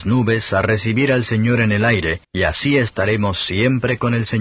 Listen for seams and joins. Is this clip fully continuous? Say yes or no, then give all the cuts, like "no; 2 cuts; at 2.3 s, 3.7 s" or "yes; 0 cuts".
no; 1 cut; at 2.2 s